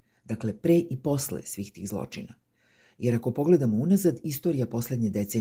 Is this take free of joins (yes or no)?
yes